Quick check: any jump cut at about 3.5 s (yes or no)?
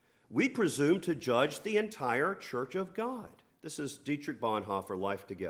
yes